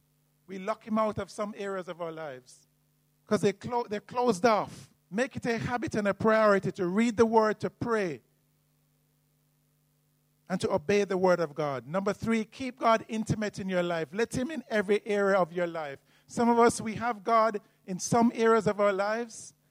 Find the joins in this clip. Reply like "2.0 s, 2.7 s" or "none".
3.1 s, 5.0 s